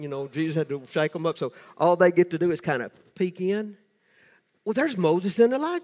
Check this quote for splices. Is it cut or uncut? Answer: uncut